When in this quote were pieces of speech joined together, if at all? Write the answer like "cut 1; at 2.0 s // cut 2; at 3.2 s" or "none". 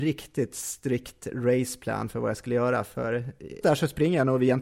cut 1; at 3.6 s